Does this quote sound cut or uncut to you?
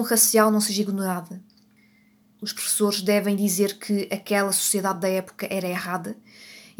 cut